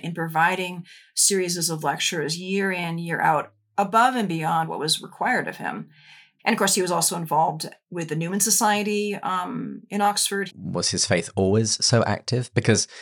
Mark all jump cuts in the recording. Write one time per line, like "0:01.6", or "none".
0:06.4
0:10.5